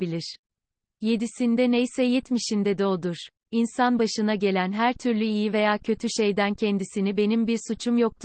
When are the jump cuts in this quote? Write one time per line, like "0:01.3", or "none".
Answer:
0:00.9
0:03.4